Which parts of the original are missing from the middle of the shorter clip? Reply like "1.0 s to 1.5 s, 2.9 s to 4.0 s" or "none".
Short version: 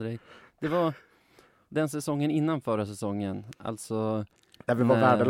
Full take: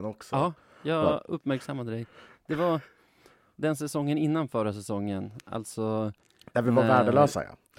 none